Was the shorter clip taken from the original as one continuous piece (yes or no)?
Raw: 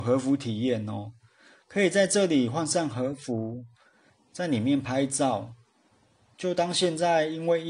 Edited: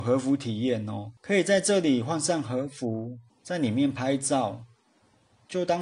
no